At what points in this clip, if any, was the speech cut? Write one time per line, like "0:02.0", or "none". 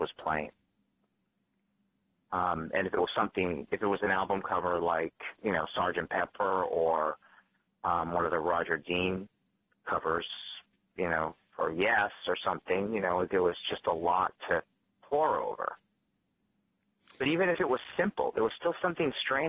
none